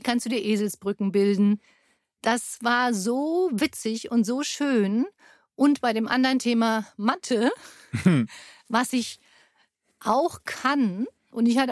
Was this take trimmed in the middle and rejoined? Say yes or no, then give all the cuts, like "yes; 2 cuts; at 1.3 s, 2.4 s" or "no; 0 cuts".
no; 0 cuts